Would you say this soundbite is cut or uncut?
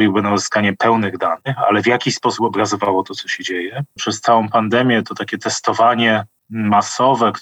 cut